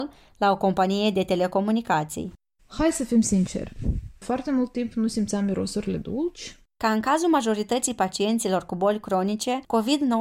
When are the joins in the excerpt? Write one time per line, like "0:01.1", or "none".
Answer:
0:04.2